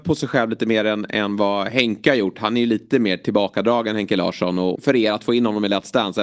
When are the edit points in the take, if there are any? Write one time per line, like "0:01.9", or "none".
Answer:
0:04.8